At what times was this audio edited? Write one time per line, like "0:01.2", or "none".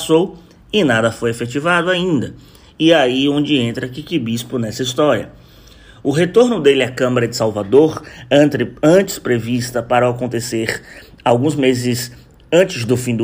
none